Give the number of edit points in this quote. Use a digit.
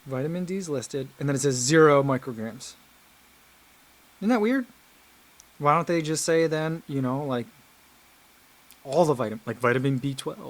0